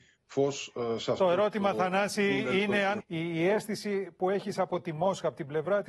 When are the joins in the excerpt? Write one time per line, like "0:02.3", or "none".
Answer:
0:03.0